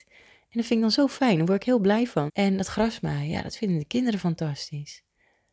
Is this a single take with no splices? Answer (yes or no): no